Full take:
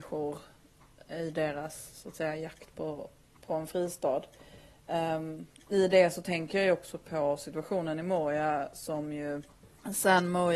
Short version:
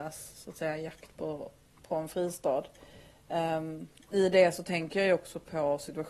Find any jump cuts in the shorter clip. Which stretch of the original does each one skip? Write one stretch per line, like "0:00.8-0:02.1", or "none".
none